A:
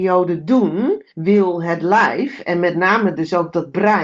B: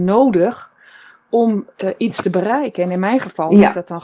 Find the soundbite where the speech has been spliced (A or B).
A